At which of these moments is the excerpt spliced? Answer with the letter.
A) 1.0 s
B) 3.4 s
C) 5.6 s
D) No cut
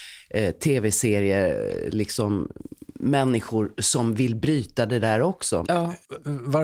C